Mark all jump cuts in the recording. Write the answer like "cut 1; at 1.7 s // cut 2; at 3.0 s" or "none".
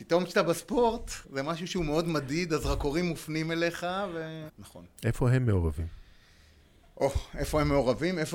cut 1; at 1.2 s // cut 2; at 4.5 s